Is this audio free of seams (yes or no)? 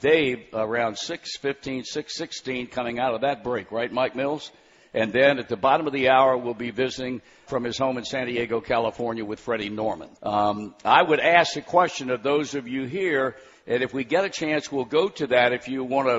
no